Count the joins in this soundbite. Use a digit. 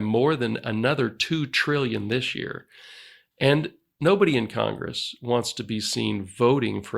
0